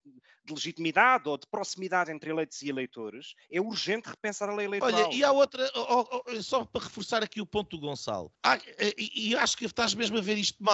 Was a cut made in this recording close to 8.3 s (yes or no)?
yes